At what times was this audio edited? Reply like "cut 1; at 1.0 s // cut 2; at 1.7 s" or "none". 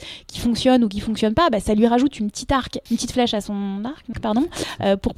cut 1; at 2.9 s // cut 2; at 4.1 s